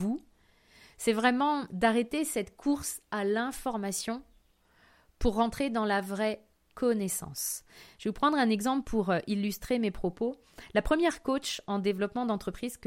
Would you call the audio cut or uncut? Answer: uncut